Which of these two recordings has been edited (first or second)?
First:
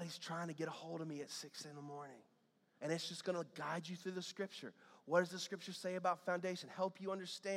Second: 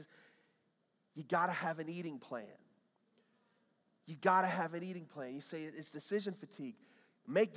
first